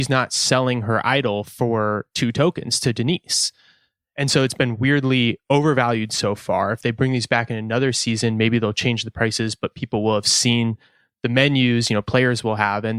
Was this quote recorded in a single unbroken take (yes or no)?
yes